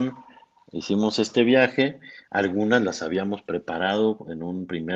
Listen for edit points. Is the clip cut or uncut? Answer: uncut